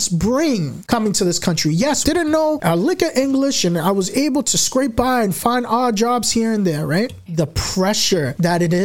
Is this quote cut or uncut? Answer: cut